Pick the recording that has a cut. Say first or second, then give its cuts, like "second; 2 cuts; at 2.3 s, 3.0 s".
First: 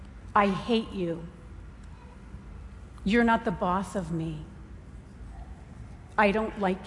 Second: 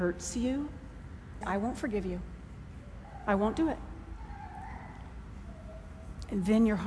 second; 1 cut; at 1.4 s